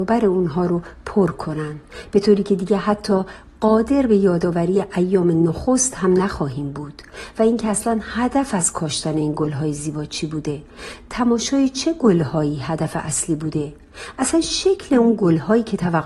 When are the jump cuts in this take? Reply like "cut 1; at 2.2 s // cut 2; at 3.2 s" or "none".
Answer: none